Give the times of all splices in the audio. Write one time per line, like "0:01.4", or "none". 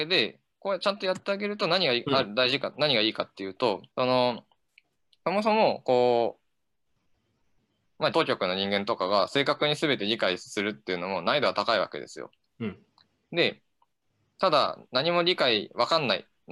0:03.9
0:08.1